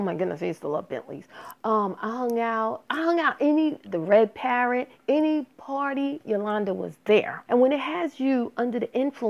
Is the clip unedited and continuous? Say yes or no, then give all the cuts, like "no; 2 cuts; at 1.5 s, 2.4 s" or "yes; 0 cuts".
no; 3 cuts; at 3.8 s, 5.0 s, 7.5 s